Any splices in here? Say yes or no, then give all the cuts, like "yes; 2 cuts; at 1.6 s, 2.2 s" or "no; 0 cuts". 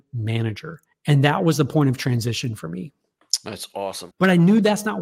yes; 1 cut; at 4.1 s